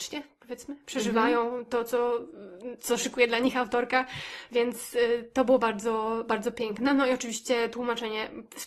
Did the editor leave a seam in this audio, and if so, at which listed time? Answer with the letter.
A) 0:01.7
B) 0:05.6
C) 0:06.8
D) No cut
D